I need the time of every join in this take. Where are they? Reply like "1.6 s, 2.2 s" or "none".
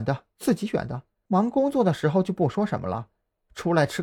1.3 s